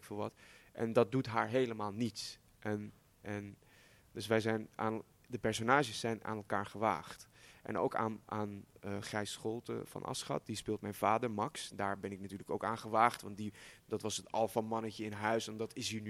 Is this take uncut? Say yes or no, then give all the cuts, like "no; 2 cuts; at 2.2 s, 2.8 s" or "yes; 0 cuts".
yes; 0 cuts